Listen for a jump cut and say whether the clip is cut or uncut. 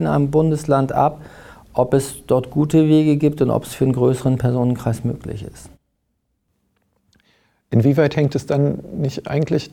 uncut